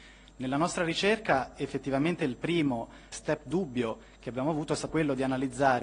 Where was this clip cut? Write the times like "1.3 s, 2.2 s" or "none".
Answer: 3.1 s, 4.9 s